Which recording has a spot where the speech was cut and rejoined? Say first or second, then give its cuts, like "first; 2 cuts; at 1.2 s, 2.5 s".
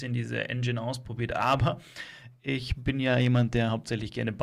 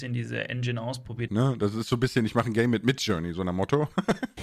second; 1 cut; at 1.3 s